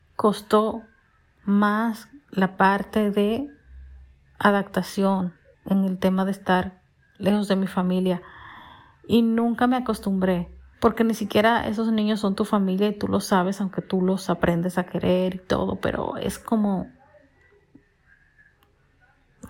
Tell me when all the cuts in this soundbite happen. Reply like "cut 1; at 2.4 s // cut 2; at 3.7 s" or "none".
cut 1; at 5.5 s // cut 2; at 10.7 s